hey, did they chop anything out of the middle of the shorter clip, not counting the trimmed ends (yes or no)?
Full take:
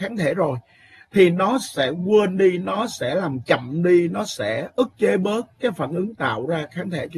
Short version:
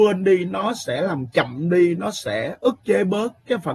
no